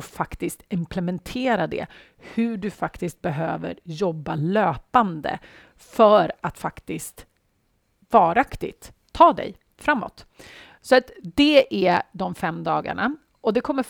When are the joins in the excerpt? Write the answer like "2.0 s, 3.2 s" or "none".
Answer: none